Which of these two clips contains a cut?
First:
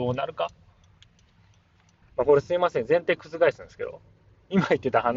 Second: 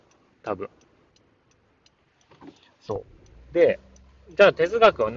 first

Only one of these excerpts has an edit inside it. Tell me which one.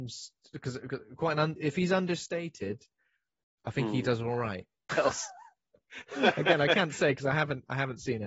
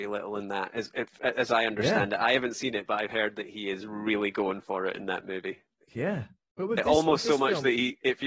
first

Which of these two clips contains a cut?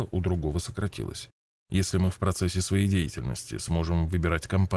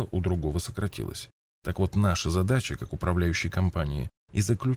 first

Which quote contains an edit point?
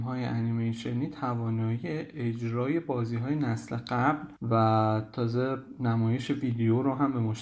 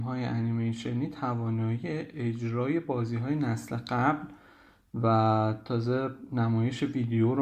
first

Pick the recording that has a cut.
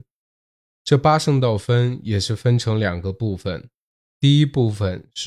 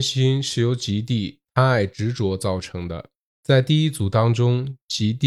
second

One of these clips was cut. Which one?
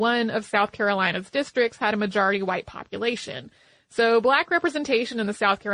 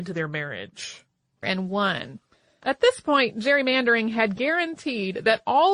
second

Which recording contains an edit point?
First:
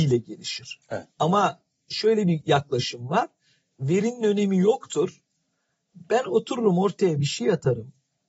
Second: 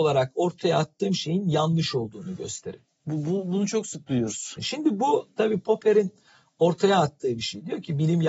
second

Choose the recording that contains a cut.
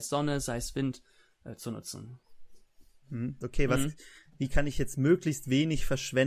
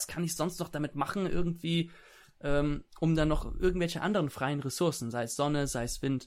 first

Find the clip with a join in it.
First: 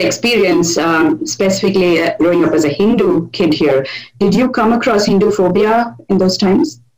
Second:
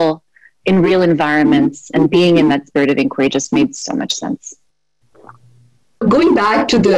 second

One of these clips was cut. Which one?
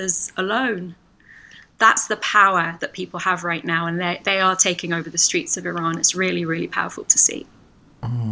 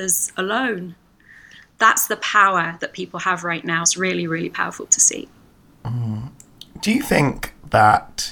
second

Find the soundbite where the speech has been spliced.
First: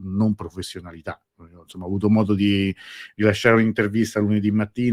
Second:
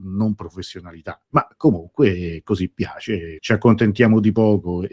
second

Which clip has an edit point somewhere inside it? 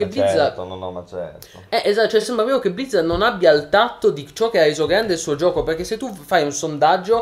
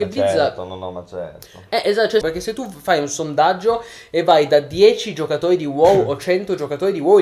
second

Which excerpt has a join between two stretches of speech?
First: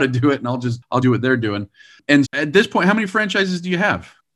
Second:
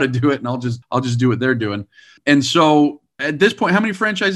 first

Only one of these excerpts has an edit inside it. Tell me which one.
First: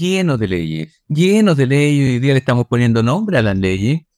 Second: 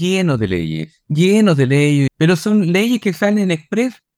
second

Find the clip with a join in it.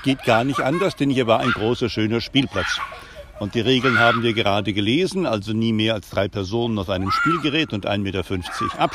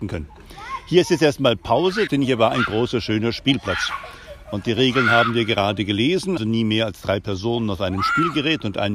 second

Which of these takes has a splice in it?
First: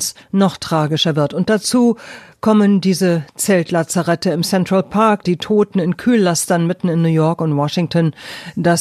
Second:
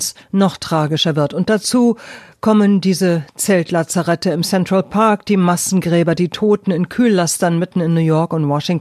first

